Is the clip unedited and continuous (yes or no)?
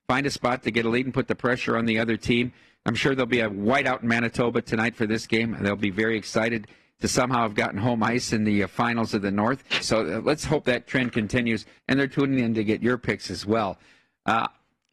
no